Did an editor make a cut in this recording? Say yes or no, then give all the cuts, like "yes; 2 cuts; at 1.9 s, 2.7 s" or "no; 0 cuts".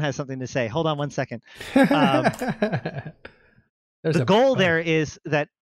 no; 0 cuts